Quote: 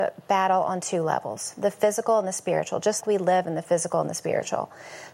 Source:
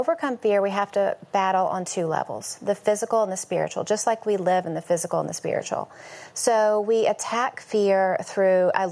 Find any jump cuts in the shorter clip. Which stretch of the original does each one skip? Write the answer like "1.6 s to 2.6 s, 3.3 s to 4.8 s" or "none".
4.0 s to 4.2 s